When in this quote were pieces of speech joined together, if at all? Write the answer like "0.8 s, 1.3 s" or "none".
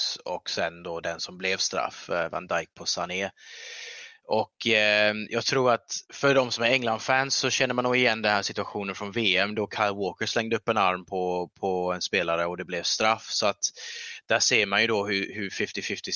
6.0 s